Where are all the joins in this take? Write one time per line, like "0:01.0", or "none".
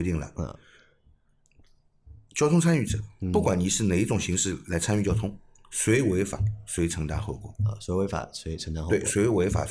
none